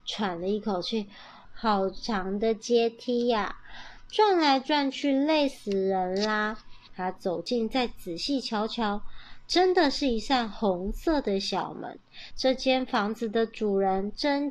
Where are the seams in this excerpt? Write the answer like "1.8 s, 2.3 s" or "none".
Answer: 1.4 s, 6.9 s, 12.3 s